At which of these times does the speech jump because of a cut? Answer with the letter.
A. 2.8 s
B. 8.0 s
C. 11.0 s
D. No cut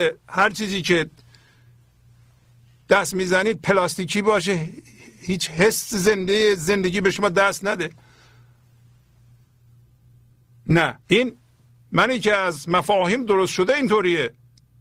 C